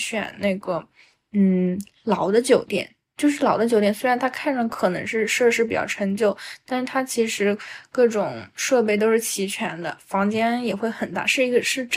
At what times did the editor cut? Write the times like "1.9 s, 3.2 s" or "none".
none